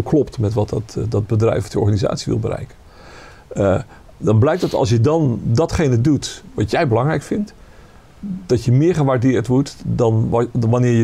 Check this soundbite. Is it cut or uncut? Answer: uncut